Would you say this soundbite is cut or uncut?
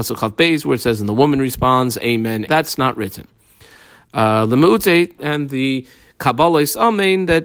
cut